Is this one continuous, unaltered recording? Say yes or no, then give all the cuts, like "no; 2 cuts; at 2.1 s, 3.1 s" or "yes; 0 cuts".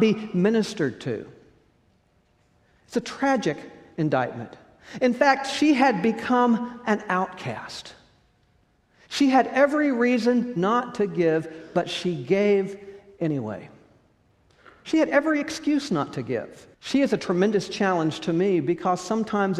no; 1 cut; at 16.7 s